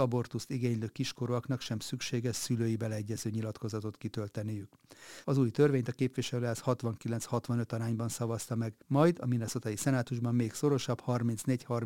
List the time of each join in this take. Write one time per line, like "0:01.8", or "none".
0:05.2
0:08.8